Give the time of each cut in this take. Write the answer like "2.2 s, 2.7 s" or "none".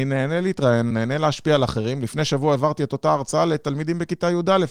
0.9 s